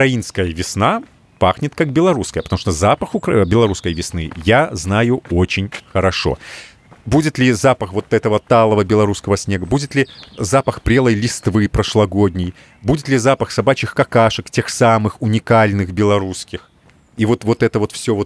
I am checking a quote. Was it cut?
no; 0 cuts

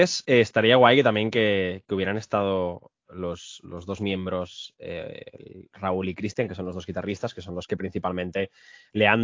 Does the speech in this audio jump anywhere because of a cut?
no; 0 cuts

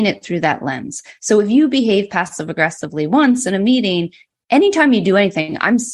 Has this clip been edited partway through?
no; 0 cuts

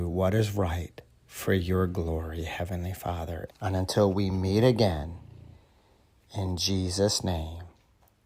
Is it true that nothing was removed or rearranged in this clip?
no; 1 cut; at 3.5 s

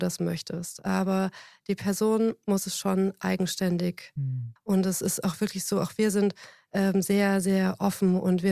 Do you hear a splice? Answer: yes; 1 cut; at 4.6 s

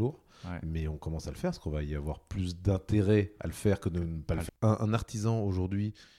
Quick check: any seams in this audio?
yes; 1 cut; at 4.5 s

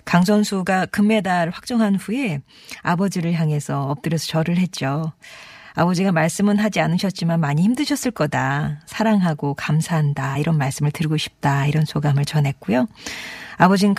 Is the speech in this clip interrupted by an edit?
no; 0 cuts

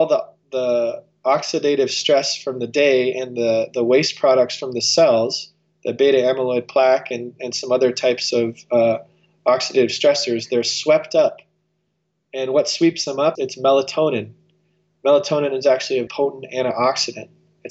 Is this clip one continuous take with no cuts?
no; 2 cuts; at 13.4 s, 16.1 s

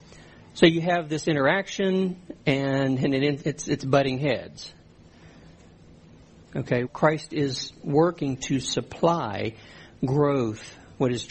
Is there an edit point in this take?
yes; 1 cut; at 6.9 s

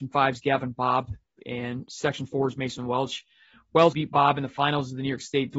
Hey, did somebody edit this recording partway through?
yes; 1 cut; at 3.9 s

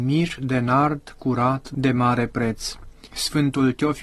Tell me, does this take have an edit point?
yes; 1 cut; at 3.1 s

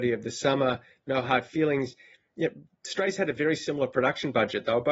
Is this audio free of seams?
yes; 0 cuts

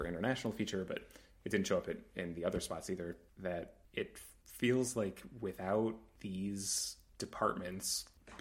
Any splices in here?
no; 0 cuts

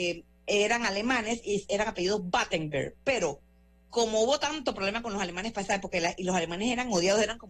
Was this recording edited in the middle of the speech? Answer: no; 0 cuts

